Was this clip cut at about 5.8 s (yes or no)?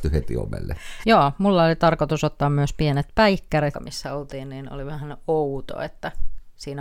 no